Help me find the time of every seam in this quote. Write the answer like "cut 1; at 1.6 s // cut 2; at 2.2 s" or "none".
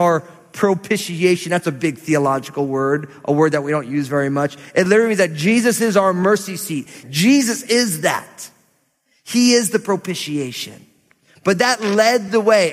cut 1; at 7.0 s